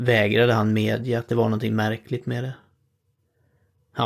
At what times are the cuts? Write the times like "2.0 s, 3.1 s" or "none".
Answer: none